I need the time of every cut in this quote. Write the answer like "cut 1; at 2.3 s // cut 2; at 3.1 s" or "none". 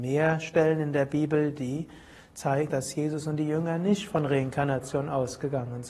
cut 1; at 2.7 s

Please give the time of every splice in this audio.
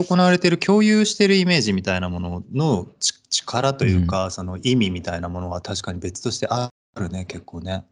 none

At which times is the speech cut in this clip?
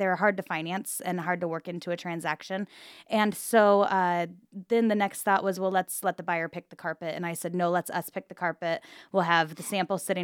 none

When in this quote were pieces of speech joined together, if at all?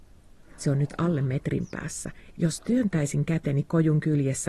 none

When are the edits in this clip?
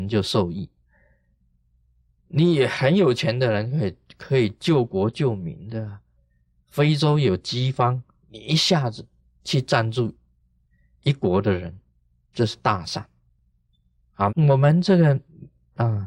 cut 1; at 14.3 s

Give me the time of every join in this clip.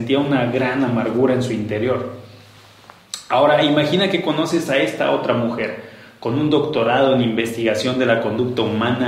none

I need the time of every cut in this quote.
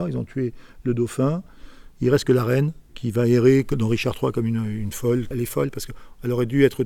cut 1; at 2.9 s

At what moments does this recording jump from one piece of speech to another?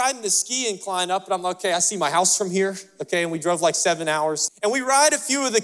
cut 1; at 4.5 s

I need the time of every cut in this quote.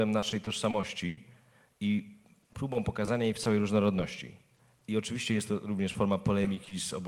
none

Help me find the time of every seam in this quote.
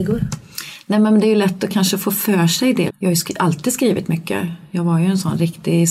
cut 1; at 2.9 s

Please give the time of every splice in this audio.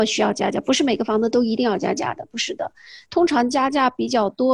none

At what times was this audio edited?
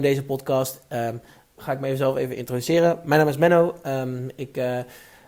cut 1; at 1.6 s

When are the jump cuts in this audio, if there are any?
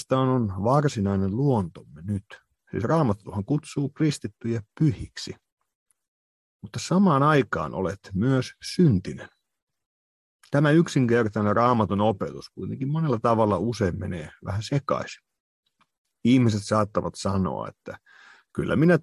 none

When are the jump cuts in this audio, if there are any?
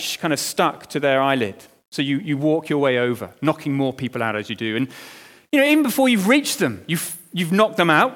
none

